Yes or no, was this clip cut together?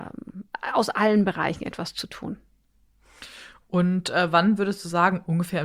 no